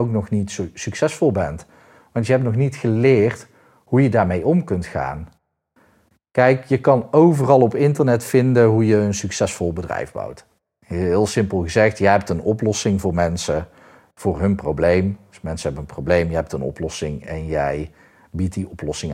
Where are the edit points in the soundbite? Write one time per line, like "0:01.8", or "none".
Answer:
none

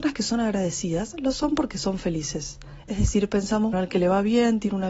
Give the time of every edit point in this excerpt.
0:03.7

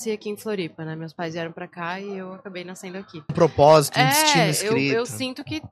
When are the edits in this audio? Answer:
0:03.3

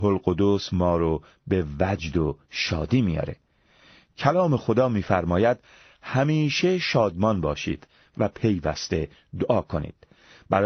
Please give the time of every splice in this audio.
none

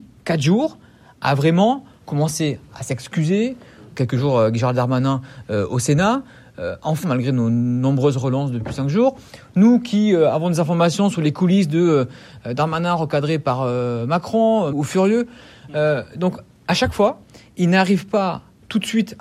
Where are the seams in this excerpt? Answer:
0:07.0
0:14.7

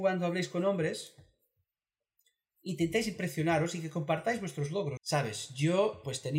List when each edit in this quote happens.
0:05.0

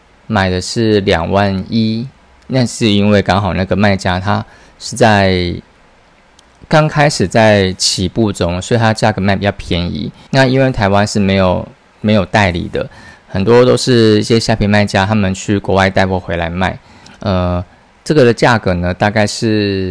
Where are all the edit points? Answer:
0:10.3
0:17.0

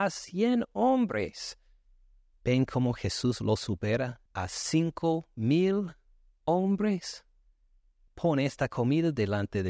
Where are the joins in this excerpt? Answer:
0:04.3
0:08.1

